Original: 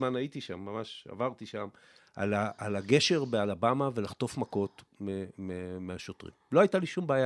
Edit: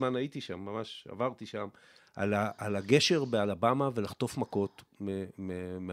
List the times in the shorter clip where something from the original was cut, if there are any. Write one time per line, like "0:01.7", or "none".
none